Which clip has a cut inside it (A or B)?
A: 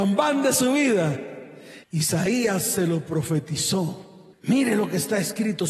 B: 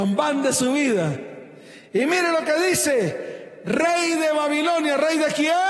A